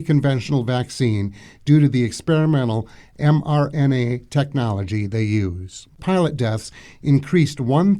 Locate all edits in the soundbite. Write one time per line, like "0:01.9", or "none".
0:06.0